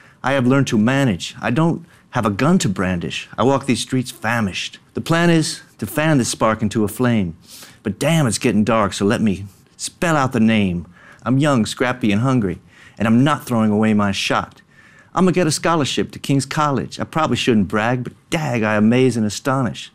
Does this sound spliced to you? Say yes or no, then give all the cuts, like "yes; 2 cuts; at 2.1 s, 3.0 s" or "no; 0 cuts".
yes; 2 cuts; at 4.9 s, 11.2 s